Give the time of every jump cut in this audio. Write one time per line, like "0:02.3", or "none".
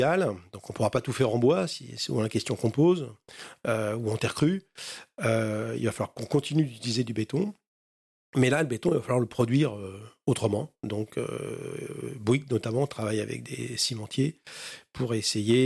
none

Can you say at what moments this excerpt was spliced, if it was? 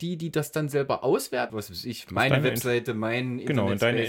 0:01.5

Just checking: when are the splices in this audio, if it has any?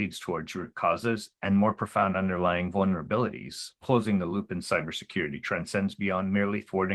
0:01.3

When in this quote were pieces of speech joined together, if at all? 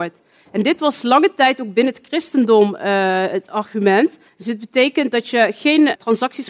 0:04.3

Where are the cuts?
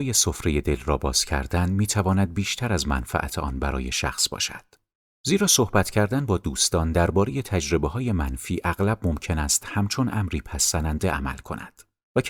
none

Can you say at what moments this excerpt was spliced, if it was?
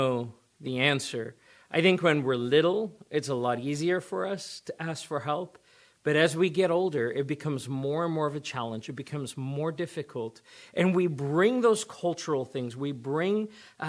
none

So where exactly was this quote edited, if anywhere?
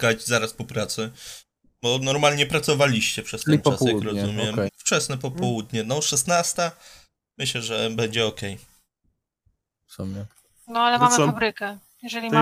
0:04.7
0:09.8

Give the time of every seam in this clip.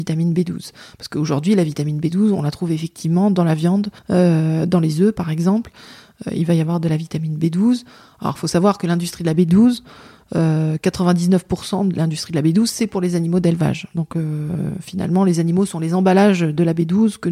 0:04.0

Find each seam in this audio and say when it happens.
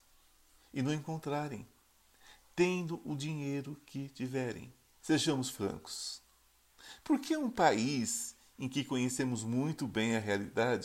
0:05.0

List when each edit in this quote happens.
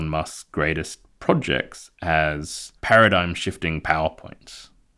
0:02.8

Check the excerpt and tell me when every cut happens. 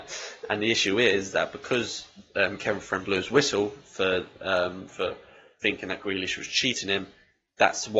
0:04.9

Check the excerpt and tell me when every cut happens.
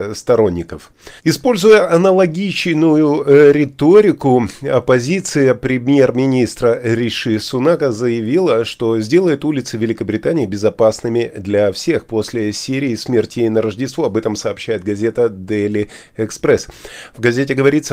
0:01.2

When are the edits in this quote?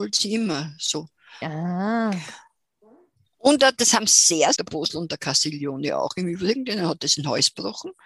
0:01.4
0:04.6

